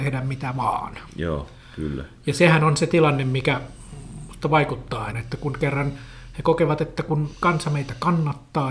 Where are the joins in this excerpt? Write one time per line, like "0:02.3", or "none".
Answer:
0:05.1